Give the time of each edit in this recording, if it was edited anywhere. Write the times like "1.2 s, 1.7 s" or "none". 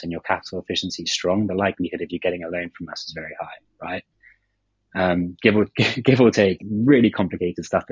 6.6 s